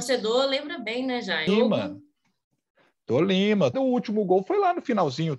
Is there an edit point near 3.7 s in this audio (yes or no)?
yes